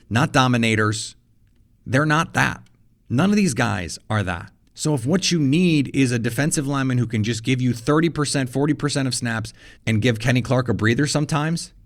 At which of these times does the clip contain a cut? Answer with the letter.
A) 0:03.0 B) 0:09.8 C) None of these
B